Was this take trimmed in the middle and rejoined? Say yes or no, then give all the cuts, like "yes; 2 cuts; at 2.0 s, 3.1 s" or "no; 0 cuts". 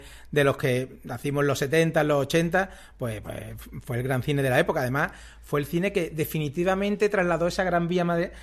no; 0 cuts